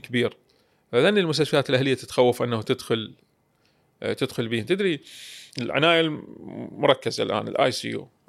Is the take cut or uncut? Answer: cut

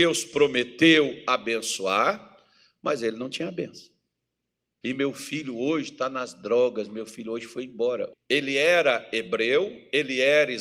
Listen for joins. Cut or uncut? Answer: cut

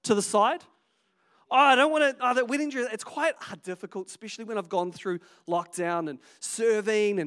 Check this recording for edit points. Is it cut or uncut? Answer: uncut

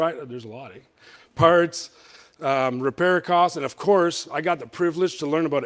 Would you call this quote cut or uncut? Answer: uncut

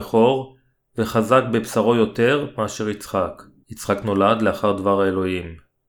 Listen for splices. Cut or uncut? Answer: cut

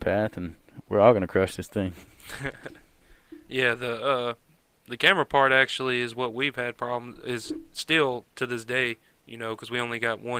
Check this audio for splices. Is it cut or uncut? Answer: uncut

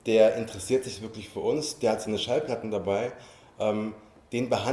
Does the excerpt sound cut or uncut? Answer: uncut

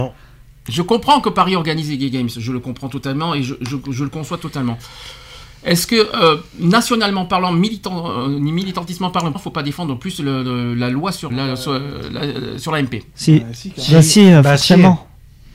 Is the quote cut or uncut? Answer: cut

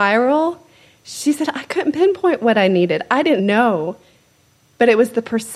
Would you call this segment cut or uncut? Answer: cut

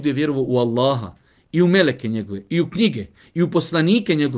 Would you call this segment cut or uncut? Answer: uncut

